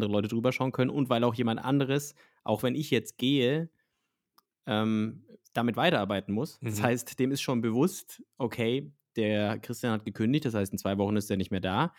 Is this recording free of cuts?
yes; 0 cuts

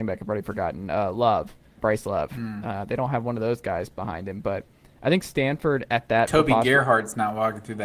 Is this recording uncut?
no; 1 cut; at 1.8 s

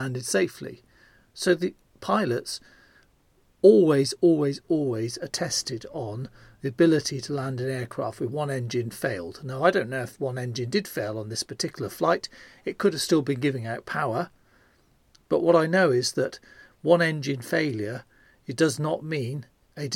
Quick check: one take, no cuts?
yes; 0 cuts

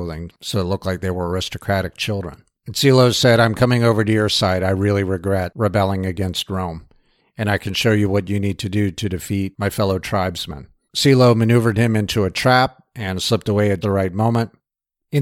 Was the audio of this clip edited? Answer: yes; 2 cuts; at 10.9 s, 13.8 s

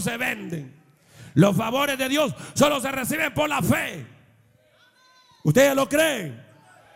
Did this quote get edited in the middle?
no; 0 cuts

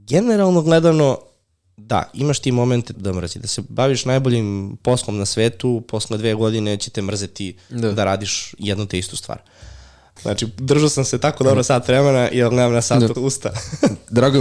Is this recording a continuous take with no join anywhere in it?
no; 3 cuts; at 2.9 s, 10.2 s, 13.1 s

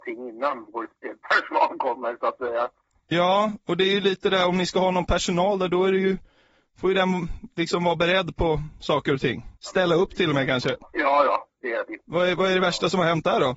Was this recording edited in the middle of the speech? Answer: yes; 2 cuts; at 9.5 s, 10.9 s

